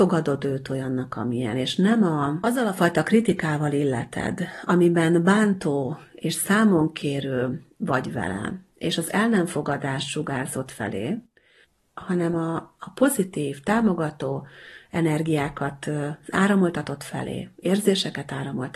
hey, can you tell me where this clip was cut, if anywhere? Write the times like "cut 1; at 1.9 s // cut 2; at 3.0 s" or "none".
none